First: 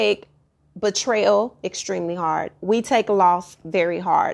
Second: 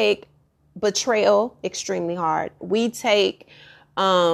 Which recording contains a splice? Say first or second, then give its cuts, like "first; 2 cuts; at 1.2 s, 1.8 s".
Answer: second; 1 cut; at 2.6 s